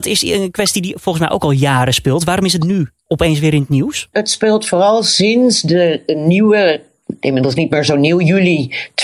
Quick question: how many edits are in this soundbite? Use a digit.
1